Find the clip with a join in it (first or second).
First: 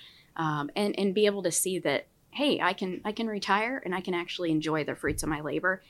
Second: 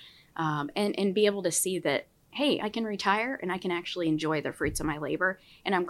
second